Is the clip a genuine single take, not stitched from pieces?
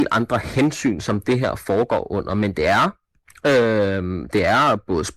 yes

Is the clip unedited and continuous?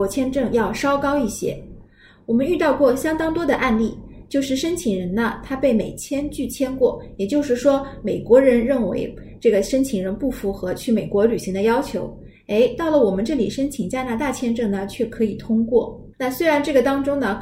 no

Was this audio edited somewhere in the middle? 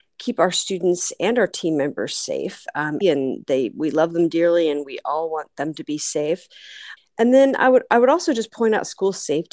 yes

